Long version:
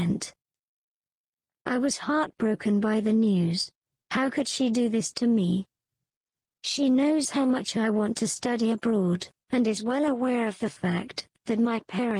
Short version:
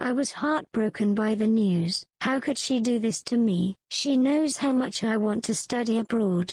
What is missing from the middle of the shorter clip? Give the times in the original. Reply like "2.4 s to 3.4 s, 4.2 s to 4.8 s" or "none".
3.8 s to 4.0 s, 5.7 s to 6.5 s